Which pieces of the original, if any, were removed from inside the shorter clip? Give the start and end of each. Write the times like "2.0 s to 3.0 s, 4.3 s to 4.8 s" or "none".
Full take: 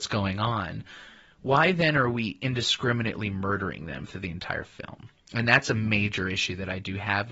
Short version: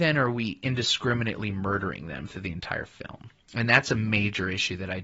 none